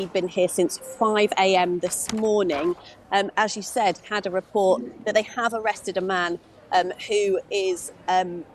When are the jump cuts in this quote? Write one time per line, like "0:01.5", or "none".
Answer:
0:03.3